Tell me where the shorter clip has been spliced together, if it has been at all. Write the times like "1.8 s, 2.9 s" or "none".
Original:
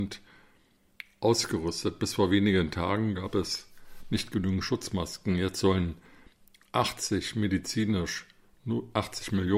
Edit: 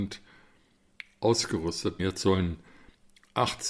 2.0 s

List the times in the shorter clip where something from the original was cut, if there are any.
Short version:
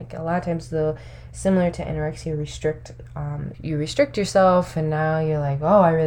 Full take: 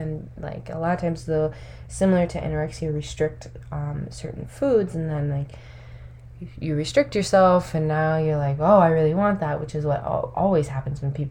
3.5 s

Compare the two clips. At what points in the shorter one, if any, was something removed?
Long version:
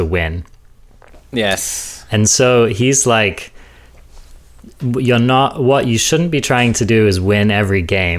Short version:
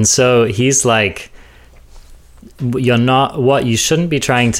none

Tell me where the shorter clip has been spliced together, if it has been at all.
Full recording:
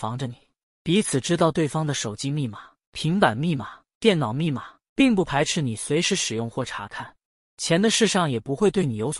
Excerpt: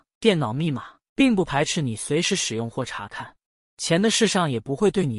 none

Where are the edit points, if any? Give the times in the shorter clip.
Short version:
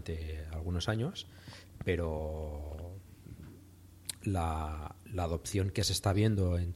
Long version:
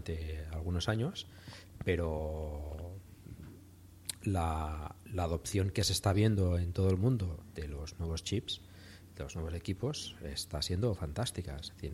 none

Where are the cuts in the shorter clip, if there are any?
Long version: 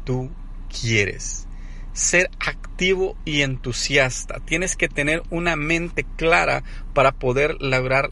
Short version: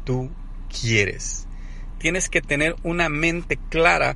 1.9 s

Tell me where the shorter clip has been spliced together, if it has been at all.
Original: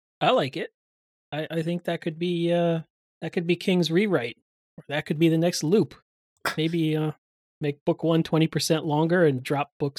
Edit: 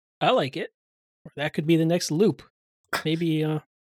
1.0 s

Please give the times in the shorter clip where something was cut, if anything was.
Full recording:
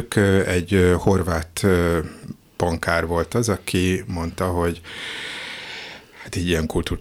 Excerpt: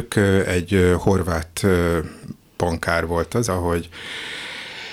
3.5 s

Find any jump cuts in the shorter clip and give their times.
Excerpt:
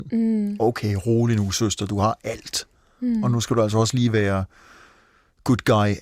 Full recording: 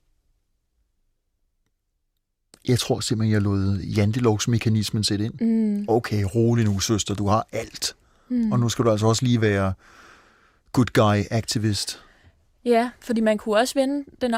none

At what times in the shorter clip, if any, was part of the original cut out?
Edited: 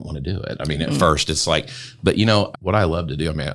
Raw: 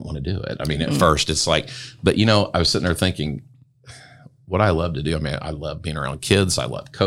2.5 s

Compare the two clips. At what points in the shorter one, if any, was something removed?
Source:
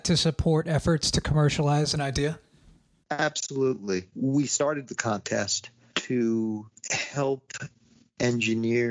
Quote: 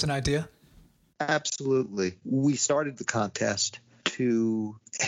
none

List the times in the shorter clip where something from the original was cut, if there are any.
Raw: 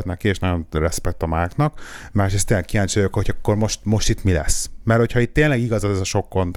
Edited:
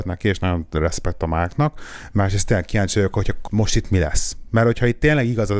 3.5 s

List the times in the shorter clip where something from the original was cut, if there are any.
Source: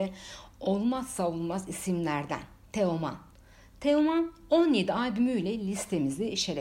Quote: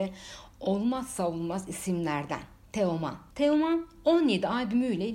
3.3 s

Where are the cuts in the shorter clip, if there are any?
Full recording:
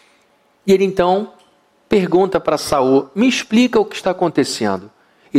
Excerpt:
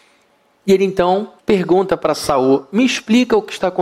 1.4 s

